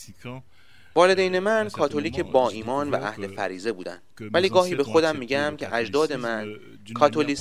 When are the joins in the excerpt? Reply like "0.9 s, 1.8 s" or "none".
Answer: 4.1 s